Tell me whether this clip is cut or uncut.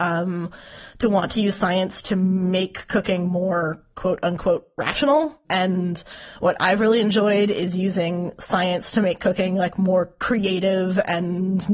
uncut